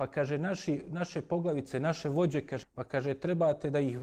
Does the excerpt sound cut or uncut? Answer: cut